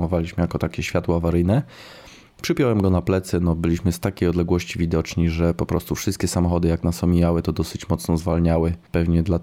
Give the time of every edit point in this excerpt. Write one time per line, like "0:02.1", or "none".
none